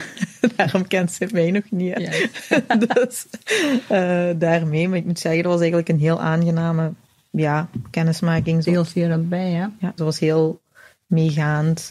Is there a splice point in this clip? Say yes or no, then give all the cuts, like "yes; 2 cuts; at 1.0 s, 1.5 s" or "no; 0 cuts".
yes; 2 cuts; at 8.6 s, 10.0 s